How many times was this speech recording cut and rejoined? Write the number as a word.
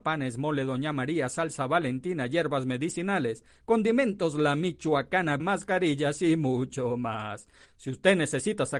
two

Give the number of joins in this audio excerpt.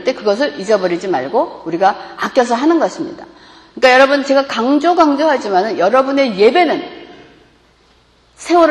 zero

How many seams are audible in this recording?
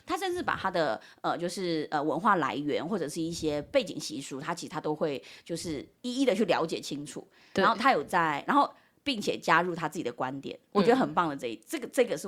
zero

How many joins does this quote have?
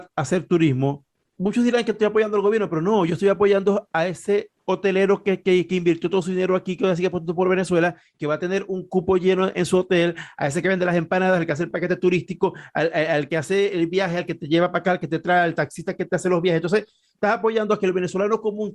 one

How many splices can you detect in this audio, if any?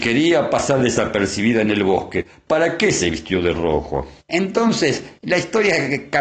one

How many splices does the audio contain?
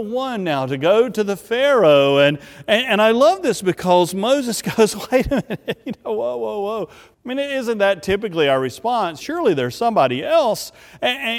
two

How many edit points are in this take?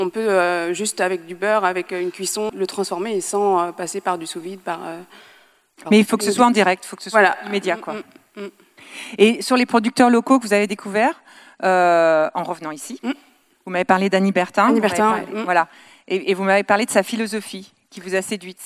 one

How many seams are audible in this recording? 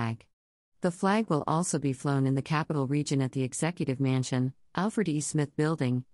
zero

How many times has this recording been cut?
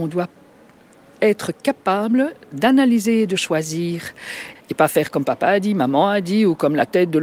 one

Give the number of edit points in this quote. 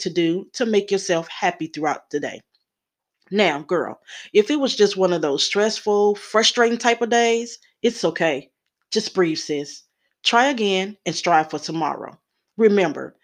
zero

